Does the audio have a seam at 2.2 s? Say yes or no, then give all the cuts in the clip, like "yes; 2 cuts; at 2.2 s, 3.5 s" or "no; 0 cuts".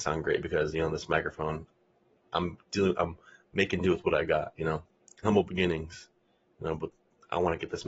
no; 1 cut; at 5.2 s